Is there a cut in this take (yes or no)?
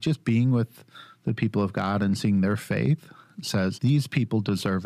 yes